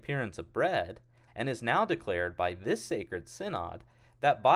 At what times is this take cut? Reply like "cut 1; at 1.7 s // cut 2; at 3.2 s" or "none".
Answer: cut 1; at 1.3 s